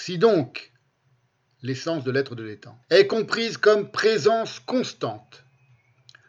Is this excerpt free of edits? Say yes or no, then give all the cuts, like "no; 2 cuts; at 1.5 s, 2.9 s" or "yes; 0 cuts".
no; 1 cut; at 2.8 s